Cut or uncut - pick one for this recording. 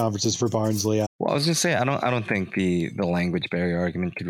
cut